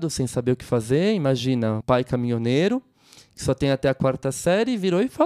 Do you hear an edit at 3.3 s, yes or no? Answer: no